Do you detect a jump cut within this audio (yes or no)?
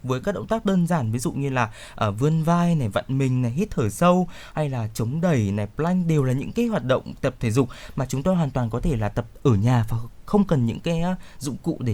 no